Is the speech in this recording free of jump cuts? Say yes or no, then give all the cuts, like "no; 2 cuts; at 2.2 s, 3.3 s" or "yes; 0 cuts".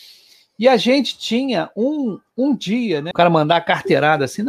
no; 1 cut; at 3.1 s